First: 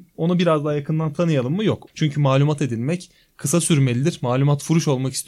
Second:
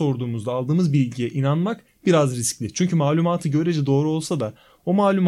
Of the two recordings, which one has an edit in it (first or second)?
first